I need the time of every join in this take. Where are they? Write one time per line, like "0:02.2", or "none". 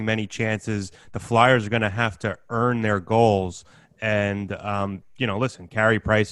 none